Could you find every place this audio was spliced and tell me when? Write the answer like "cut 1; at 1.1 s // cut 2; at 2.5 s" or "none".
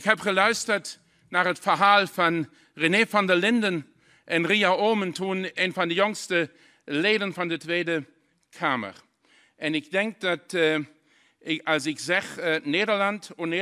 none